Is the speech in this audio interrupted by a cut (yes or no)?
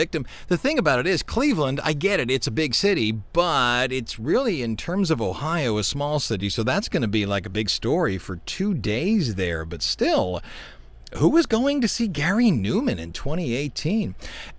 no